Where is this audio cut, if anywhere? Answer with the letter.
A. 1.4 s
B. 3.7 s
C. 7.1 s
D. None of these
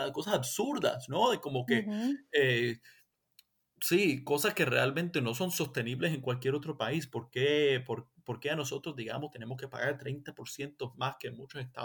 D